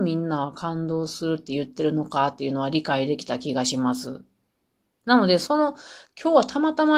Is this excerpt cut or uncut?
uncut